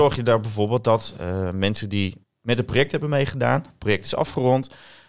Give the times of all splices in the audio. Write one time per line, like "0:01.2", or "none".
0:02.2